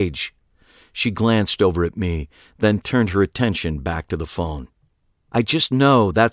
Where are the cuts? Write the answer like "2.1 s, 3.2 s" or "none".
none